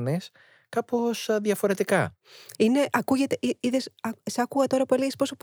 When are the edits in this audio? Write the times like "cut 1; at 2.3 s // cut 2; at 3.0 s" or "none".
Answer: cut 1; at 2.6 s